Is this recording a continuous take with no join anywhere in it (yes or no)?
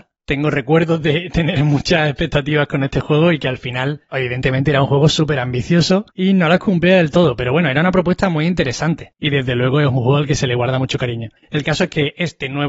no